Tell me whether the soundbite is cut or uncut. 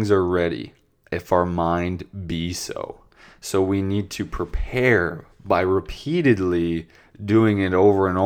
uncut